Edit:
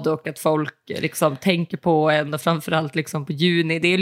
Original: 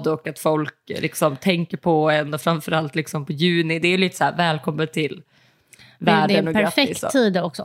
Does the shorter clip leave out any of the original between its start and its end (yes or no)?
no